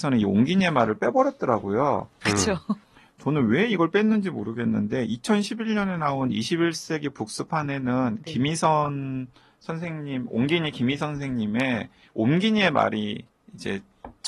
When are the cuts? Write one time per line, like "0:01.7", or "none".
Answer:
0:02.2